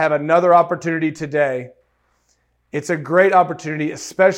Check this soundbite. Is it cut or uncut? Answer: uncut